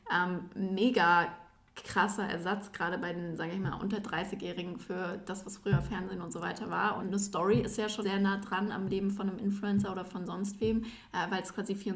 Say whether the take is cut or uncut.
cut